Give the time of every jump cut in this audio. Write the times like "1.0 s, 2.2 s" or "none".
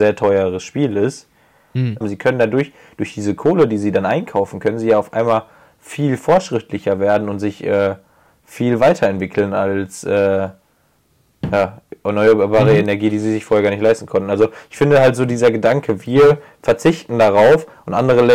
2.0 s

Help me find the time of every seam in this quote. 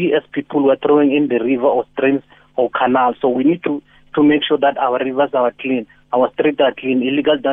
none

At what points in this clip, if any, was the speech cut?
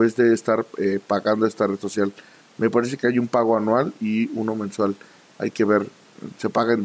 none

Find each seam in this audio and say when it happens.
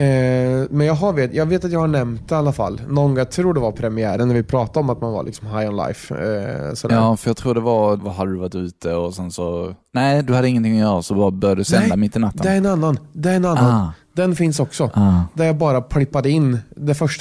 8.0 s

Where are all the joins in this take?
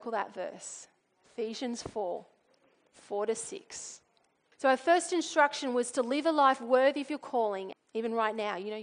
4.5 s, 7.7 s

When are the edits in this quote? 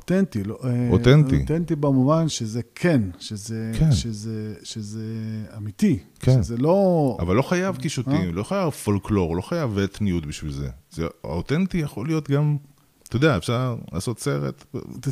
2.3 s

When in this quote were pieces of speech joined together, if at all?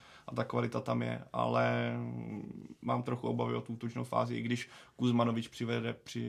2.8 s

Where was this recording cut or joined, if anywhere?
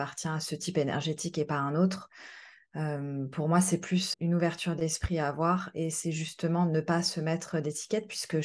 4.1 s

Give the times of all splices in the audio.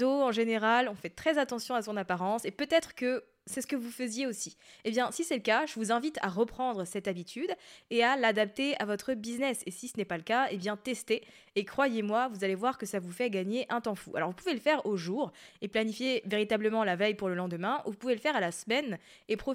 none

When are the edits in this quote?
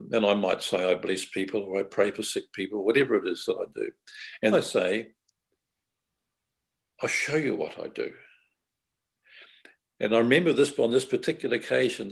4.5 s

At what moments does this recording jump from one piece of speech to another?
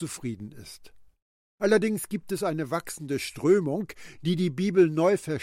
none

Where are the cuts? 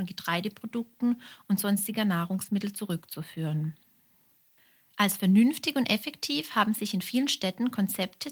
none

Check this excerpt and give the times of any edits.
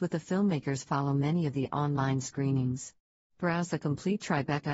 3.3 s

